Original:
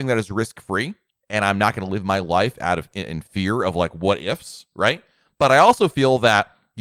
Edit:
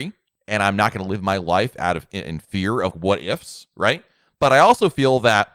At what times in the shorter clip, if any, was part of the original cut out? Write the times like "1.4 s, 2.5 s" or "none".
2.9 s